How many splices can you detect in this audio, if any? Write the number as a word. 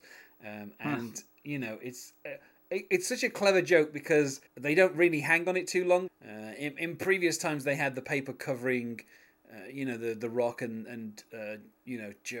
two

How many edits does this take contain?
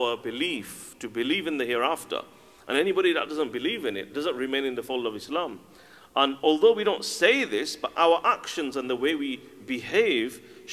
zero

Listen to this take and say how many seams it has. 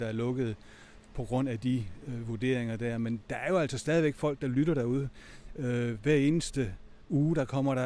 zero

